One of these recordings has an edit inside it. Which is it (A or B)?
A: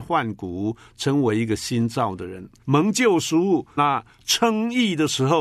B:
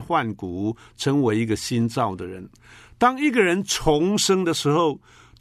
A